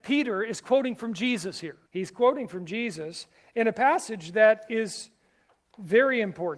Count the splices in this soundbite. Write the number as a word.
one